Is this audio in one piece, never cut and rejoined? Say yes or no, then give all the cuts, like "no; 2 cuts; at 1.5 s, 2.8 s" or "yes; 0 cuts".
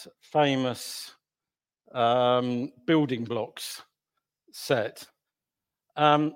yes; 0 cuts